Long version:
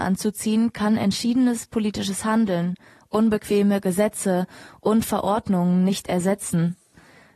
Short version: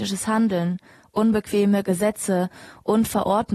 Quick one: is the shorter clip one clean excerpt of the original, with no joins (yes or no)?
yes